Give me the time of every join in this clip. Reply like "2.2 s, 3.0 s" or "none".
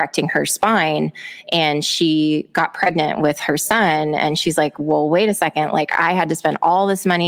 none